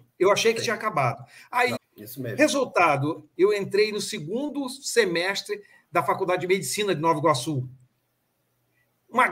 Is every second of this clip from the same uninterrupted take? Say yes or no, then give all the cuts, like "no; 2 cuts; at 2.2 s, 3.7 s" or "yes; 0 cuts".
no; 2 cuts; at 1.8 s, 3.4 s